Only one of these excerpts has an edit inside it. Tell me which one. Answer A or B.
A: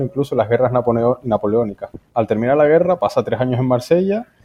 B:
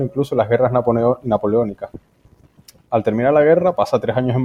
A